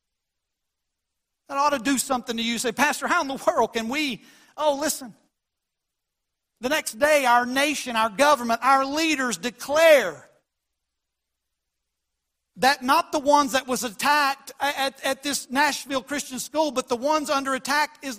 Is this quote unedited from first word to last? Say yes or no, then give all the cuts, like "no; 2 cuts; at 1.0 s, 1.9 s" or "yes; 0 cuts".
yes; 0 cuts